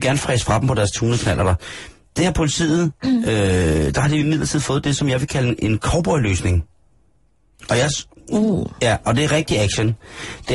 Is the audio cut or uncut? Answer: uncut